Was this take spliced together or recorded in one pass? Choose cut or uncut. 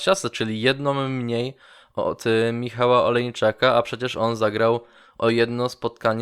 uncut